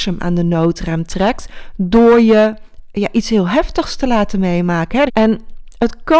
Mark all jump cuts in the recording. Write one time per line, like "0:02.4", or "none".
0:05.1